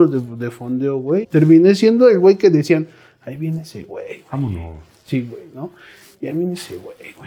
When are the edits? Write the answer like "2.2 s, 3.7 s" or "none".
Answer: 1.2 s